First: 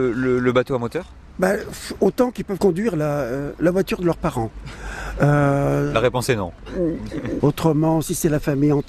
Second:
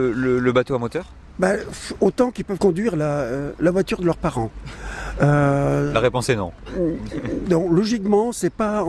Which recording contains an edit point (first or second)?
first